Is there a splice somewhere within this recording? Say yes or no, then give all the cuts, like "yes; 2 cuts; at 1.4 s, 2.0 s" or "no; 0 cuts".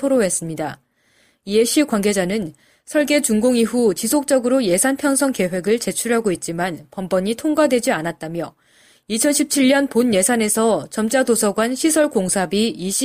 no; 0 cuts